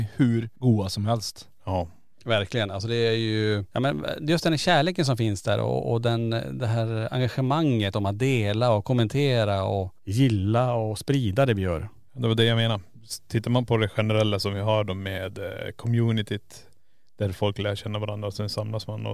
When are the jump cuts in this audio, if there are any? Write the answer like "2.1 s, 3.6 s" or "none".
none